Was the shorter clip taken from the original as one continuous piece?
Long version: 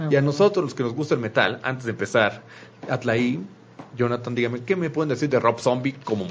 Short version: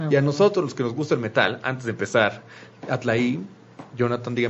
yes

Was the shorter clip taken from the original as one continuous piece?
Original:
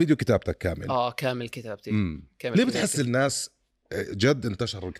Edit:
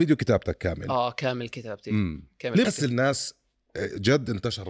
no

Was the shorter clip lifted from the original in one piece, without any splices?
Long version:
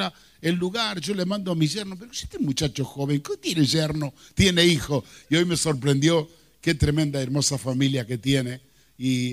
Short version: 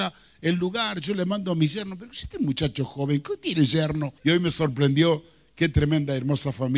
no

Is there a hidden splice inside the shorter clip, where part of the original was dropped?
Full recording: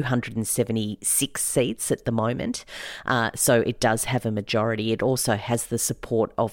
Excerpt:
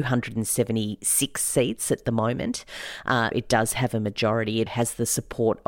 yes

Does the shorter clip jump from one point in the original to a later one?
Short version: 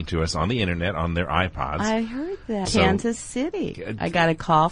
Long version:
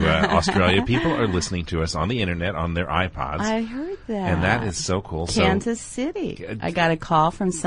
yes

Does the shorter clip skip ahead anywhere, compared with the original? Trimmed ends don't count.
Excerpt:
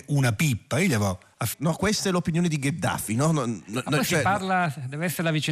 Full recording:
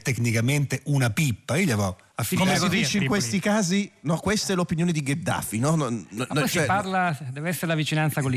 yes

